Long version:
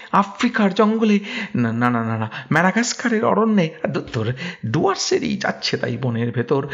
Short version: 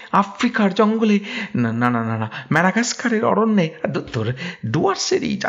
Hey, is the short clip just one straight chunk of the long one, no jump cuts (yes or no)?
yes